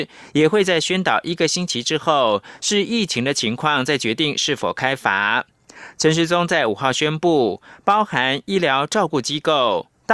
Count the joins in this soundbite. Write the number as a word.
zero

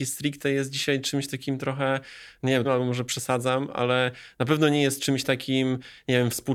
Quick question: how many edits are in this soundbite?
one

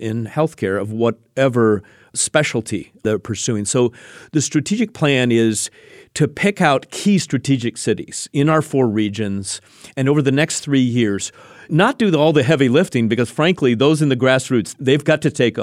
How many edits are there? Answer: zero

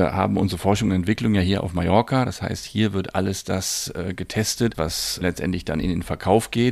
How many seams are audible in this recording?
zero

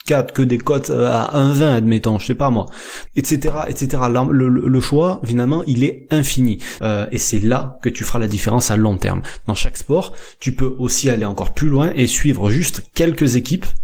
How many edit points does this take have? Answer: three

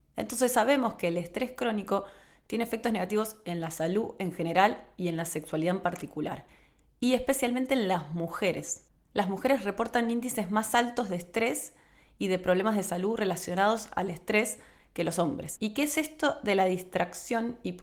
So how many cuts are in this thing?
one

